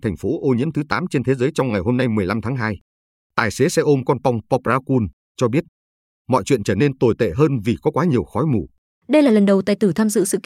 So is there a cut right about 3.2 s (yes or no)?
no